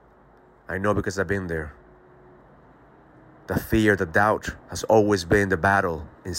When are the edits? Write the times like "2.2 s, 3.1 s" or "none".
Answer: 4.6 s